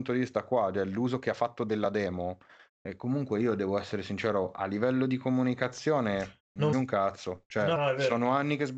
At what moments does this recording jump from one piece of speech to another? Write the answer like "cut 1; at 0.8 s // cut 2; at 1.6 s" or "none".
cut 1; at 6.7 s // cut 2; at 7.8 s